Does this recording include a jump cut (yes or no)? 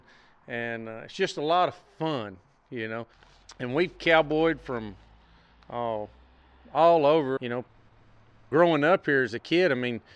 yes